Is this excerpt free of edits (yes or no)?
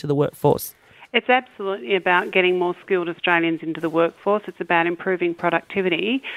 yes